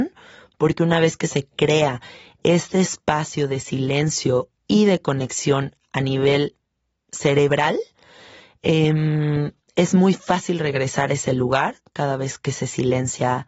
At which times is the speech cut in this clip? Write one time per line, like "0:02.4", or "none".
none